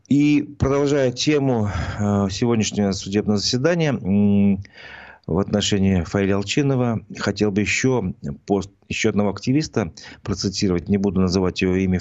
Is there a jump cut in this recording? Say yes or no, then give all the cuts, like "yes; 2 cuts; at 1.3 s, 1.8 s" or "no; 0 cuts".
no; 0 cuts